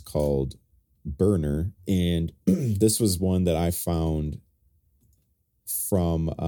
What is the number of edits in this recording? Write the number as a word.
one